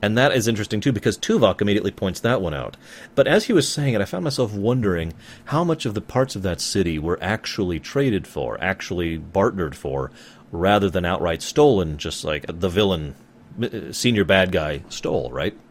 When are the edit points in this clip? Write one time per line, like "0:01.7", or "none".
0:12.5

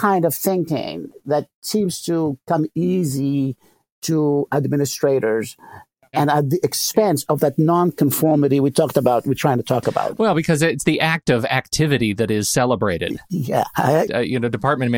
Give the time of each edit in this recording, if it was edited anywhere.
0:14.1

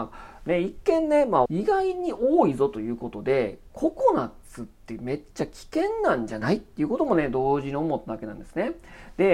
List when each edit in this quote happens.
0:01.5

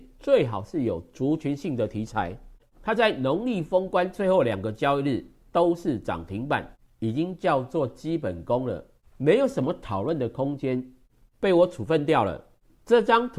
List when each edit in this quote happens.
0:02.6
0:06.9
0:11.2

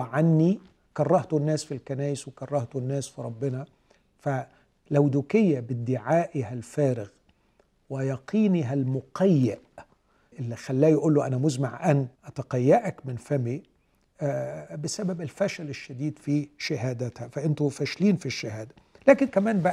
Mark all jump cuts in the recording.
0:10.3
0:12.1

